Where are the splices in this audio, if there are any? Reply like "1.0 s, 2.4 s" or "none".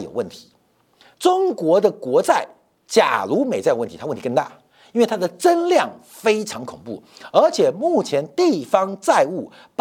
1.1 s